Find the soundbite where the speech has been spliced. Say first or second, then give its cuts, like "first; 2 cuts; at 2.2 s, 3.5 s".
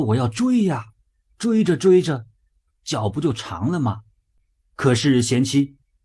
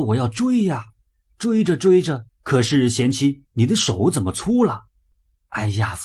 second; 2 cuts; at 2.3 s, 3.5 s